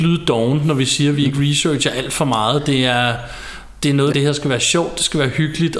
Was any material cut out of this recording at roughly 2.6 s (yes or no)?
no